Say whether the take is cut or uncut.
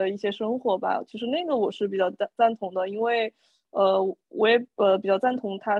uncut